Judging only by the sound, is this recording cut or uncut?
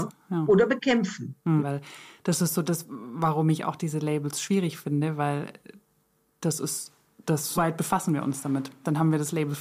cut